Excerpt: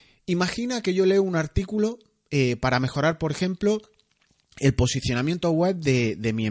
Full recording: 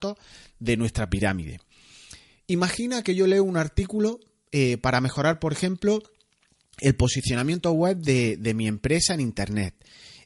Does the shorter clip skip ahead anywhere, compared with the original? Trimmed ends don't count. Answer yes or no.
no